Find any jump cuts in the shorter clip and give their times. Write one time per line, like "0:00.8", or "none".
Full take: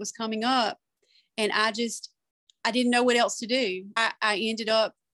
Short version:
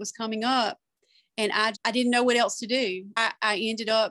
0:01.7